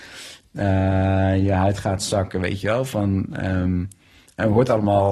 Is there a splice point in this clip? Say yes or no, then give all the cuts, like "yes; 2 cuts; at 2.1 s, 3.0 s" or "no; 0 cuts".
no; 0 cuts